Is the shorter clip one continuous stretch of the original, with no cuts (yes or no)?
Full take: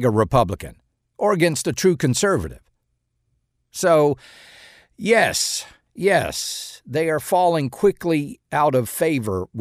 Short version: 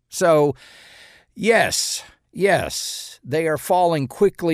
yes